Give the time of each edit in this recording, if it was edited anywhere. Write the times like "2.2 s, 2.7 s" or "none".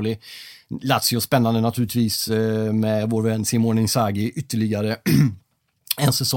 none